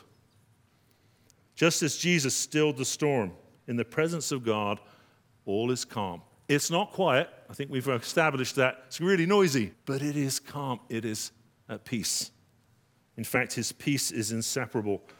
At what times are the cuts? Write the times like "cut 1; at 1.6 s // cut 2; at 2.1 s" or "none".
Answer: cut 1; at 9.7 s

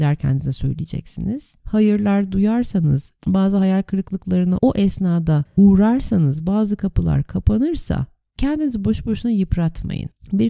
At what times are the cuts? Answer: cut 1; at 1.6 s

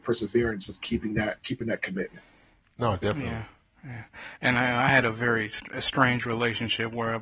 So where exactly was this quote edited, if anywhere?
none

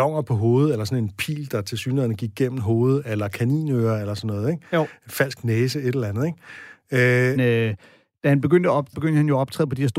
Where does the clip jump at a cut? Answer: cut 1; at 7.4 s // cut 2; at 8.9 s

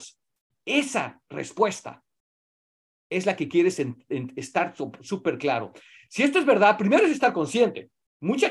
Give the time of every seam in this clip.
none

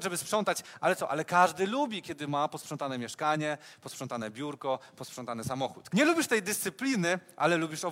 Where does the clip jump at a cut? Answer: cut 1; at 5.9 s

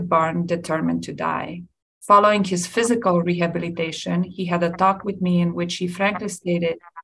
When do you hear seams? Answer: cut 1; at 1.8 s

